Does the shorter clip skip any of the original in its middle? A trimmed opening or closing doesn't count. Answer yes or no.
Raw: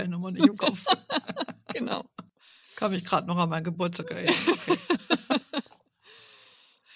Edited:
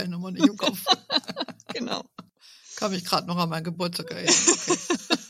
no